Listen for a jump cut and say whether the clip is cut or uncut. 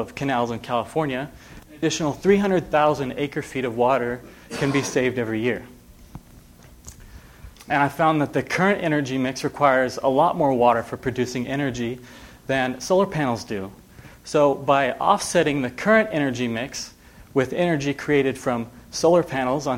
cut